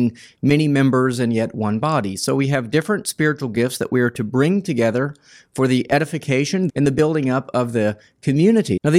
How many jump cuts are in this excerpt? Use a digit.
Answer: 1